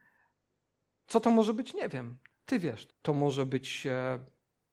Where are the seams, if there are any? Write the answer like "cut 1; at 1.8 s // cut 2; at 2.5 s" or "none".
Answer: cut 1; at 2.9 s